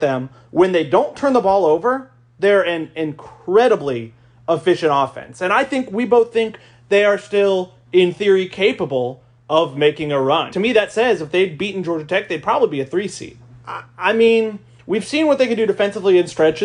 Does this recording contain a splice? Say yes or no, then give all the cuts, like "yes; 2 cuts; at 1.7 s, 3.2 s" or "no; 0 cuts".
yes; 2 cuts; at 10.5 s, 13.5 s